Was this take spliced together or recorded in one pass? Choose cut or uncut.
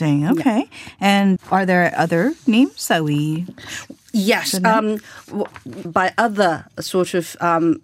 cut